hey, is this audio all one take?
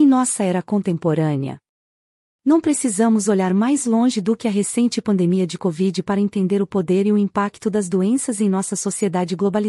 yes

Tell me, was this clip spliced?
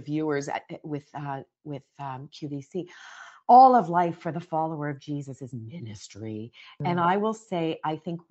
no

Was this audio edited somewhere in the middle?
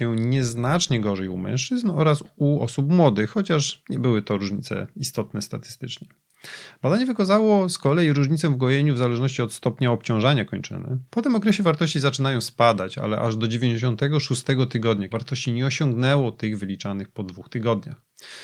yes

